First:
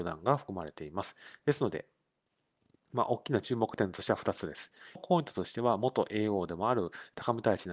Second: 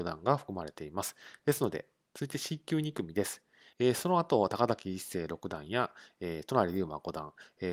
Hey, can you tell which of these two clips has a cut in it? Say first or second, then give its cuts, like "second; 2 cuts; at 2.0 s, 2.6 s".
second; 2 cuts; at 2.0 s, 3.7 s